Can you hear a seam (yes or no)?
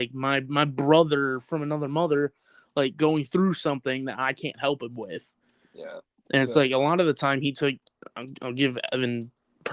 no